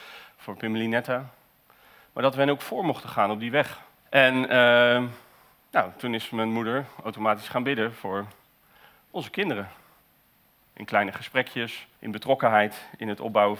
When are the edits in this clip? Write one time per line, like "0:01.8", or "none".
0:04.0
0:10.6
0:11.9